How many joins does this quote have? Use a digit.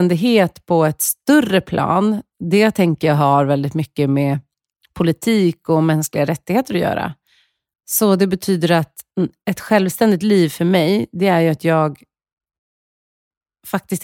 1